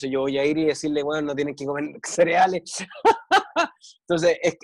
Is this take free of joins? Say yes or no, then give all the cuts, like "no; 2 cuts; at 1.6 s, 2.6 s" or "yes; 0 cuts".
yes; 0 cuts